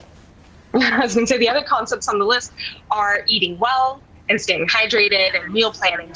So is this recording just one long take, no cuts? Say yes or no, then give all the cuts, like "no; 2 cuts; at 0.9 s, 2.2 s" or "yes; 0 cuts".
yes; 0 cuts